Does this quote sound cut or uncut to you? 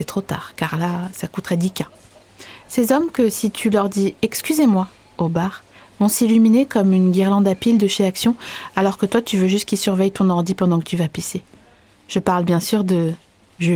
uncut